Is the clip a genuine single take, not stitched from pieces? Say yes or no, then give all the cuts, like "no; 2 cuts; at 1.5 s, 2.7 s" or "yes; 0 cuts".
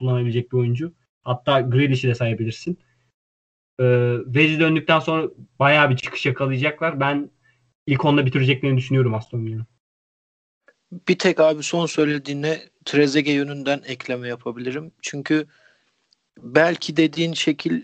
yes; 0 cuts